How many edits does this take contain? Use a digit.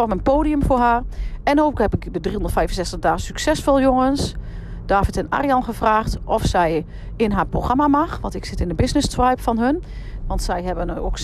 1